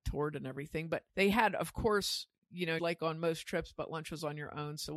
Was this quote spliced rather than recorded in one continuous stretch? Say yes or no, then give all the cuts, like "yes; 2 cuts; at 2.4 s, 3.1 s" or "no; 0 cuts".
yes; 2 cuts; at 1.1 s, 2.8 s